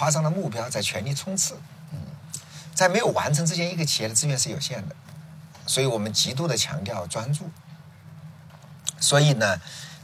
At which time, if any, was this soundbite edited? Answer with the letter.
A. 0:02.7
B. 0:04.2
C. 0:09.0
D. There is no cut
D